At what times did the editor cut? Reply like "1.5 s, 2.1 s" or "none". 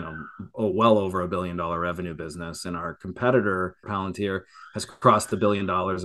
3.8 s